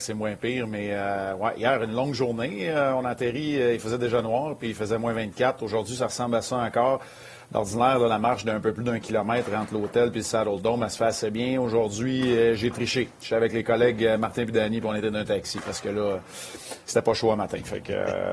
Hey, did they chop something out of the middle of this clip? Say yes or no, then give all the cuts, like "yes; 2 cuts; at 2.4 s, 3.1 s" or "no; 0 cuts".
no; 0 cuts